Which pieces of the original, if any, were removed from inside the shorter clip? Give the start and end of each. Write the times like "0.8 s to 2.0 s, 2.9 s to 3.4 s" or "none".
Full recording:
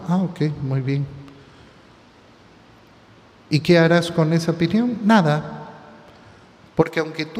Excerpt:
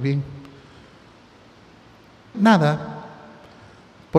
3.2 s to 5.0 s